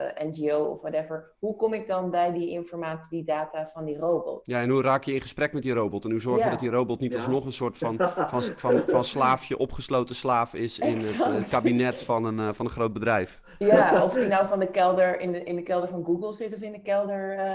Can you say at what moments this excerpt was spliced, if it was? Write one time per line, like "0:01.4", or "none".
none